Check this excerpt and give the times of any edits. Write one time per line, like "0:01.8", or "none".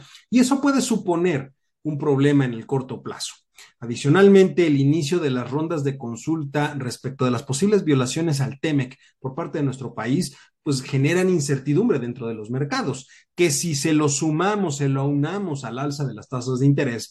none